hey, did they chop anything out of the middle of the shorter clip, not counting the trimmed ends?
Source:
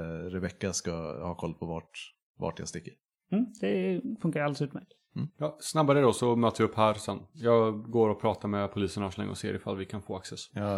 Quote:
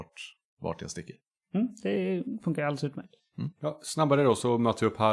no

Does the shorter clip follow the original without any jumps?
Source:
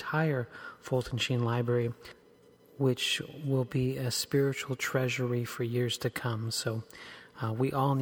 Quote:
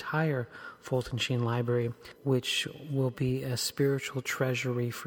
no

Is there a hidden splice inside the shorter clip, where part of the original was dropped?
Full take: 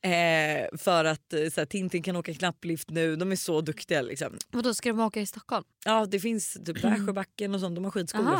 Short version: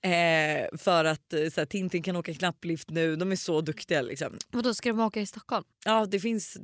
no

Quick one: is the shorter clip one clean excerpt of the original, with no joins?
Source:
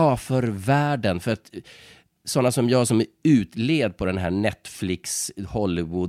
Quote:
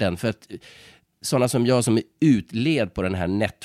yes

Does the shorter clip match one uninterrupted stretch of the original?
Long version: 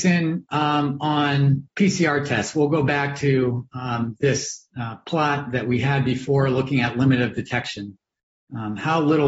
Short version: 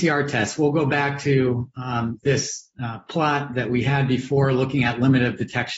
yes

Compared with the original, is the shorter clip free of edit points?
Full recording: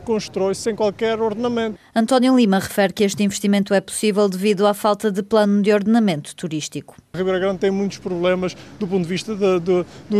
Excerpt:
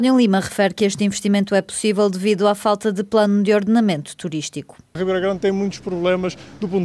yes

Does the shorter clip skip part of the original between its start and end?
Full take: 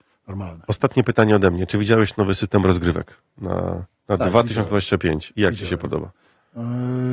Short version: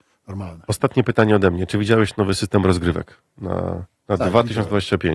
no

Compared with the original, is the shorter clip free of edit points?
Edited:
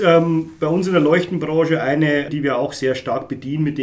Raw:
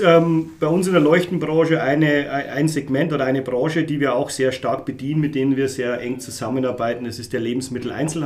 no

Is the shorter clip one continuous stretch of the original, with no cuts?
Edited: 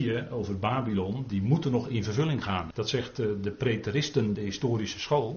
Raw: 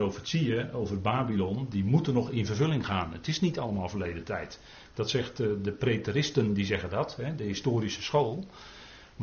no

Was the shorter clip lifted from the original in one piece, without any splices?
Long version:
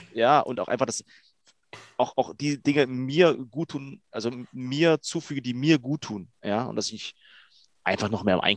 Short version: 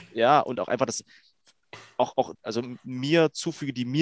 no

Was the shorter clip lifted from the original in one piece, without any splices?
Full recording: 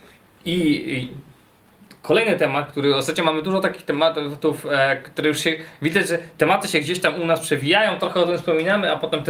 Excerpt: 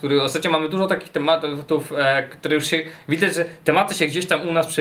yes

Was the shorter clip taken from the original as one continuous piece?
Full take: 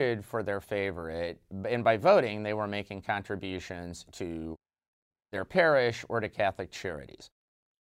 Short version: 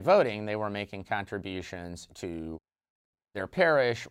yes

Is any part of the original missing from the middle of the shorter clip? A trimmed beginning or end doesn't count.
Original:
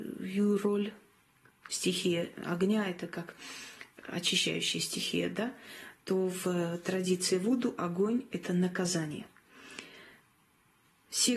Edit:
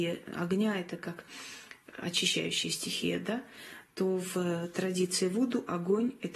no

